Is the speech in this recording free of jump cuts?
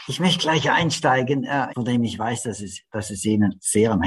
no; 1 cut; at 1.7 s

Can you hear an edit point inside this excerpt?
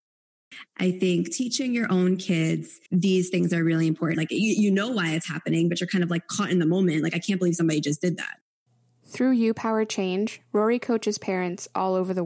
yes; 2 cuts; at 2.9 s, 4.1 s

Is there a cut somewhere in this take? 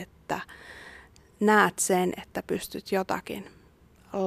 no; 0 cuts

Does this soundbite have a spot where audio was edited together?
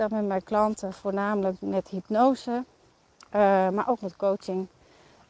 no; 0 cuts

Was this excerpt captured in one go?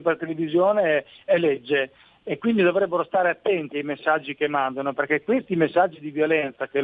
no; 1 cut; at 1.3 s

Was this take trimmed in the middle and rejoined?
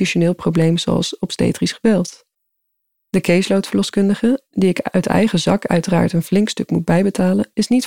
no; 0 cuts

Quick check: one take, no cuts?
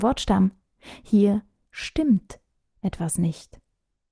yes; 0 cuts

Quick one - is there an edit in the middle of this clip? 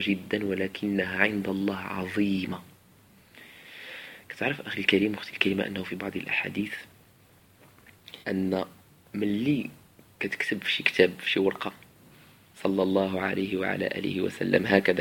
yes; 1 cut; at 8.2 s

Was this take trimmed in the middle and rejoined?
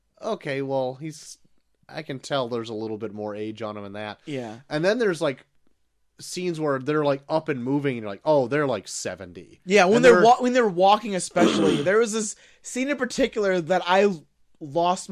no; 0 cuts

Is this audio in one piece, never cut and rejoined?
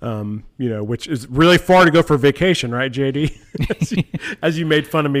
yes; 0 cuts

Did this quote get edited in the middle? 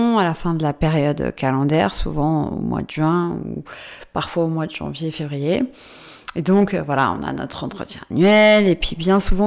no; 0 cuts

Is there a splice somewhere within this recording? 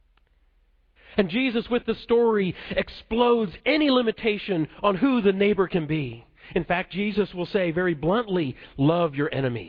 yes; 1 cut; at 1.0 s

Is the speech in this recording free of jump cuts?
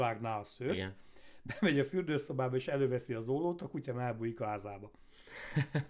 yes; 0 cuts

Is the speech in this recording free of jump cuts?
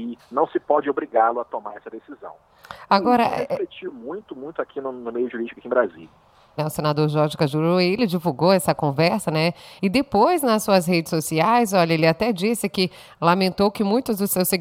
no; 2 cuts; at 6.6 s, 9.8 s

